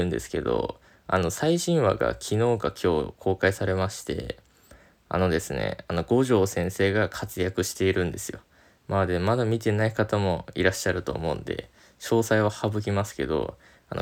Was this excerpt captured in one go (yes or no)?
yes